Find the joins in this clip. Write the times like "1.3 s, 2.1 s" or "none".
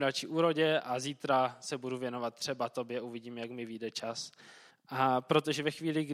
4.7 s

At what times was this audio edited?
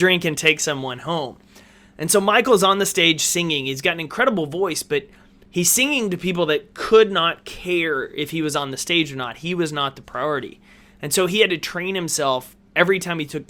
none

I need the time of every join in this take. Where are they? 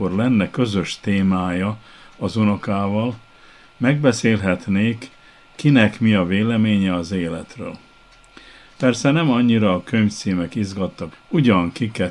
8.6 s, 11.1 s

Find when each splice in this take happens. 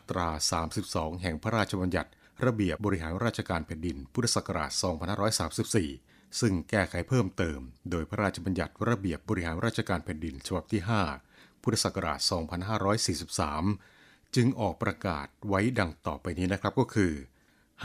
2.8 s, 7.8 s

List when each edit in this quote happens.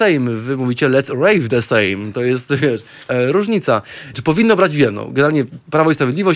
3.1 s, 4.1 s

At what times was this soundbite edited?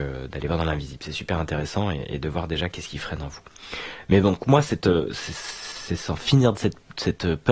none

